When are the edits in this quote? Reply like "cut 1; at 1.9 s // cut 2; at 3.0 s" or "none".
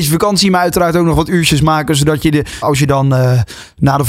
cut 1; at 2.6 s